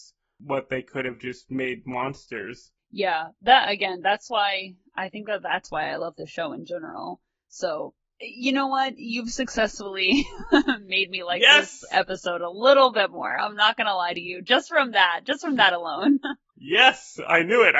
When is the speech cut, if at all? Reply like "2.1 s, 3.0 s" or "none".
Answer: none